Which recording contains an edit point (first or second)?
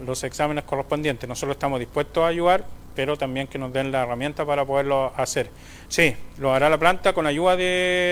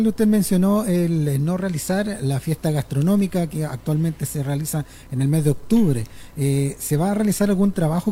first